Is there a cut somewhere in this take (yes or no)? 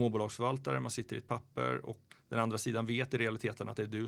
yes